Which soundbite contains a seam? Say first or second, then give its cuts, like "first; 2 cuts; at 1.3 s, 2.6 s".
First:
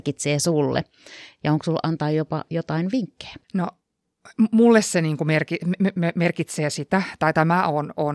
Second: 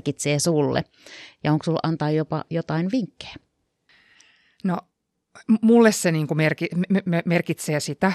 first; 1 cut; at 3.4 s